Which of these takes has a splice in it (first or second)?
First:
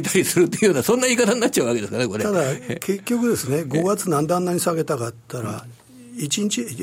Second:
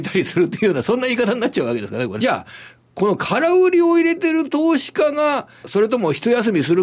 second